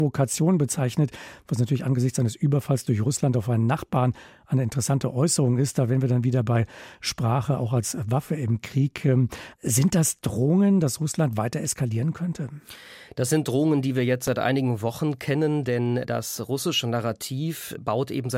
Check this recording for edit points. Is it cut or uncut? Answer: cut